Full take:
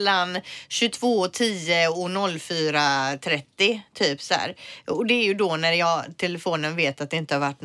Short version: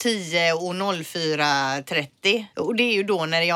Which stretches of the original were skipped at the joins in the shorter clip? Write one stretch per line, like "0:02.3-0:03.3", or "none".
0:03.9-0:04.8